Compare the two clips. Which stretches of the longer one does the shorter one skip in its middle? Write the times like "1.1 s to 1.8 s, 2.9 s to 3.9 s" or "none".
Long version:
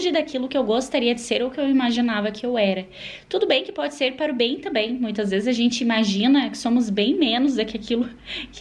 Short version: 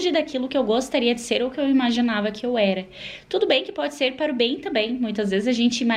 none